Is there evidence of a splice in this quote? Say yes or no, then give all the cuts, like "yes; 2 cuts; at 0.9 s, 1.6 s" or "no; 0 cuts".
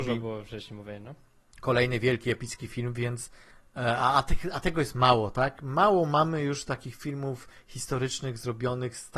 no; 0 cuts